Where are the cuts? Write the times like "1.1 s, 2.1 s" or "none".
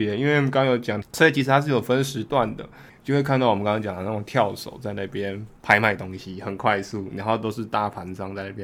1.0 s, 2.9 s, 5.6 s